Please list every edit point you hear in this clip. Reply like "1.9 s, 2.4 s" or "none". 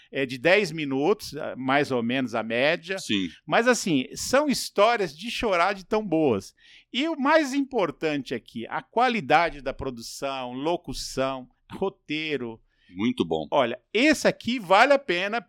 none